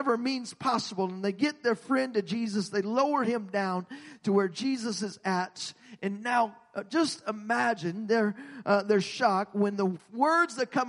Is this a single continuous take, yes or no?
yes